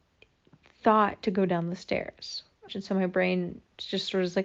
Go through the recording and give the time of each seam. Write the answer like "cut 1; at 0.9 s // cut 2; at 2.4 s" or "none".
cut 1; at 2.7 s